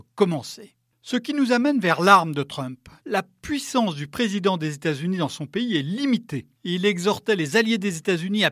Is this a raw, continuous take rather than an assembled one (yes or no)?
no